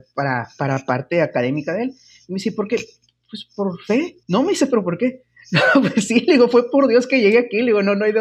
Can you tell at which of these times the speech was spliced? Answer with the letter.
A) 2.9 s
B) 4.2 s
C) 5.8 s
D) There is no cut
B